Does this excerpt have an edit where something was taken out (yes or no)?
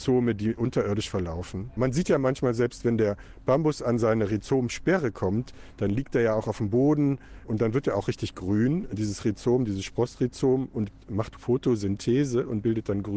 no